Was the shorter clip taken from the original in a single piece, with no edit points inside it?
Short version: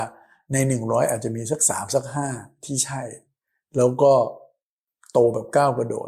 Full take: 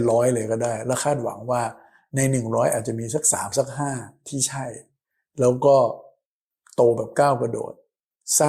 yes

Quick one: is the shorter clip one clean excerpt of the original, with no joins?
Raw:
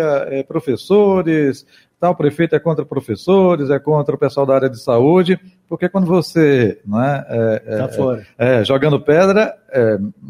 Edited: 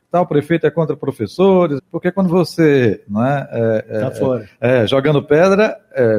no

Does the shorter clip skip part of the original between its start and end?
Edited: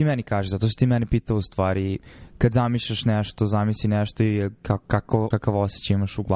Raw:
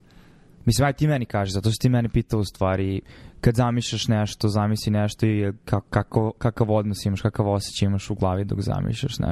yes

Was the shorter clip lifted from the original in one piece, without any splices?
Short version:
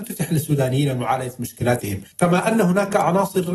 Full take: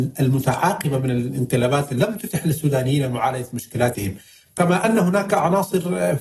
no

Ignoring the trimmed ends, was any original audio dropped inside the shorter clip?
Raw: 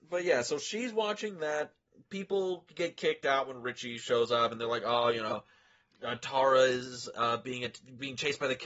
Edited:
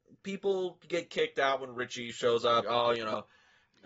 yes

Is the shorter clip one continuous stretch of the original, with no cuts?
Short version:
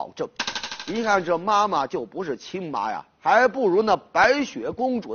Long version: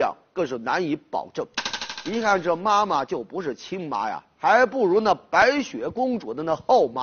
yes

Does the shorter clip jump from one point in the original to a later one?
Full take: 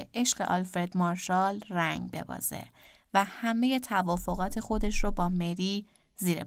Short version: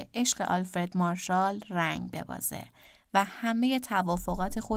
no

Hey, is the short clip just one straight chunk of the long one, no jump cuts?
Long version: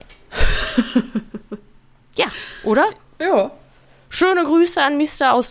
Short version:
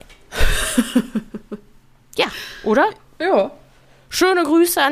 yes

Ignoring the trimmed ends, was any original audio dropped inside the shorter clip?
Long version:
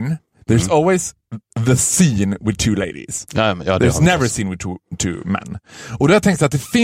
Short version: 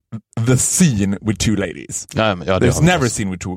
no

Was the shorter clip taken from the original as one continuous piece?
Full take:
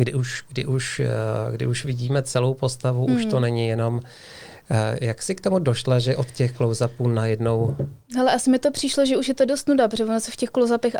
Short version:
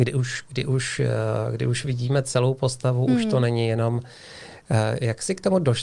yes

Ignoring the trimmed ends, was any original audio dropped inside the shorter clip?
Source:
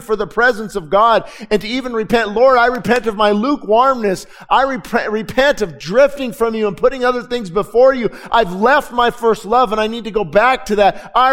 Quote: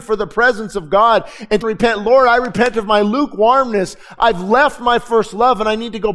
yes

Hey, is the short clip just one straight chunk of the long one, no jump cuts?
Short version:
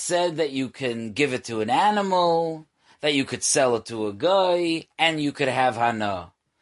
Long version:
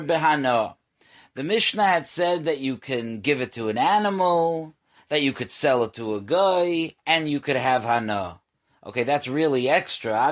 yes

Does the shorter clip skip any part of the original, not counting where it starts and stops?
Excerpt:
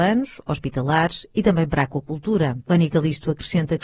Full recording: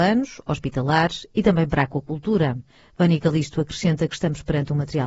yes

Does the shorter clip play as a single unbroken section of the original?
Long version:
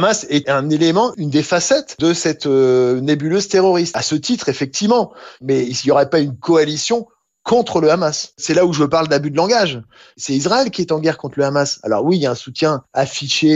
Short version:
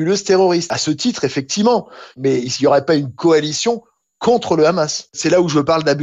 yes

